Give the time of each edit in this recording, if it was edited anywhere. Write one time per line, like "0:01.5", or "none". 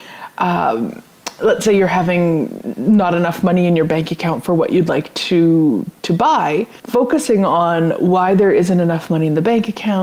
0:06.8